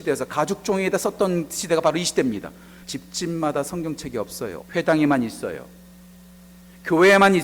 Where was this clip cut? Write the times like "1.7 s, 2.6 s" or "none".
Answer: 2.8 s, 4.6 s